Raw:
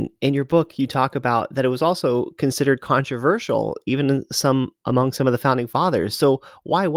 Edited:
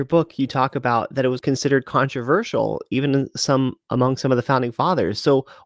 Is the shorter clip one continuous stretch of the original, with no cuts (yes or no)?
no